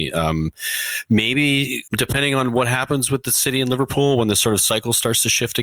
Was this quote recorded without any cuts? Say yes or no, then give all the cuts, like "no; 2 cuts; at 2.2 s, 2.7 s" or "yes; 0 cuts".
no; 1 cut; at 1.9 s